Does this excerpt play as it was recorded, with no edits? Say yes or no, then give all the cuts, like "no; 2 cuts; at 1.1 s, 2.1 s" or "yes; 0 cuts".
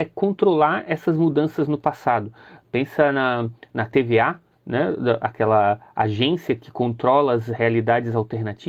yes; 0 cuts